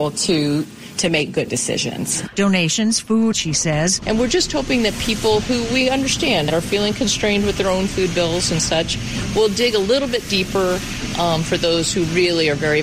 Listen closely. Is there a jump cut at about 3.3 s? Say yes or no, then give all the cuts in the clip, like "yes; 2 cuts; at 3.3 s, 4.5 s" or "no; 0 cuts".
yes; 2 cuts; at 2.3 s, 3.3 s